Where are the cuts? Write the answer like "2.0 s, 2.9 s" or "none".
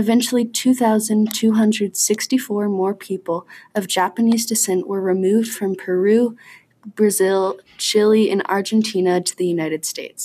none